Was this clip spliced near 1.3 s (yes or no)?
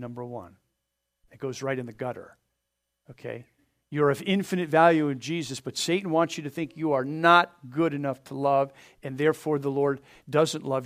yes